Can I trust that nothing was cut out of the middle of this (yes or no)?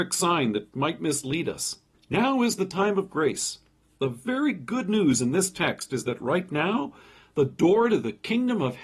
no